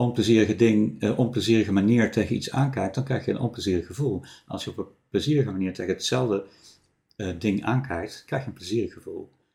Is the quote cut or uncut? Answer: uncut